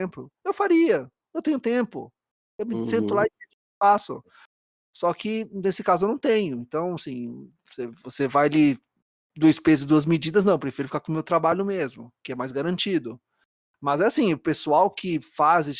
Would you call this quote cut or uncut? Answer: uncut